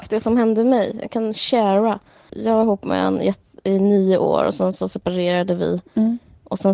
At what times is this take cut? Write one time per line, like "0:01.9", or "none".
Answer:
0:02.3